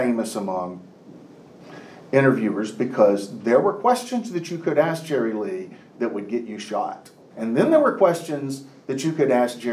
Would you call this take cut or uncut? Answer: cut